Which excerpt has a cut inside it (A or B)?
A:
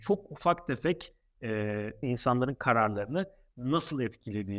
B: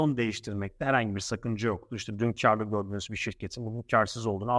A